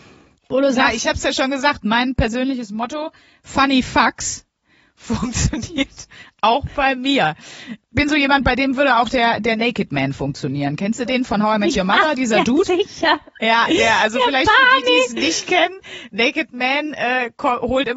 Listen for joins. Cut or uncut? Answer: uncut